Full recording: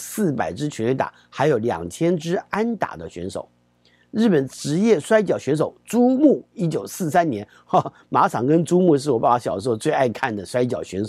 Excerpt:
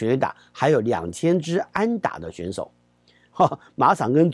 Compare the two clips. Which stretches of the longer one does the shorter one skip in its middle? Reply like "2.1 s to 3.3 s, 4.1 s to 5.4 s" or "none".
4.1 s to 7.6 s